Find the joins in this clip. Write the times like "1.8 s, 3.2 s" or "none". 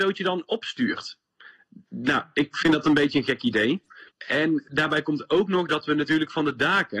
4.1 s